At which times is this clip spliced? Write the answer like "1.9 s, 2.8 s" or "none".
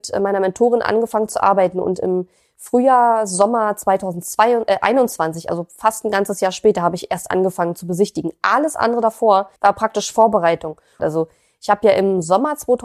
9.6 s, 11.0 s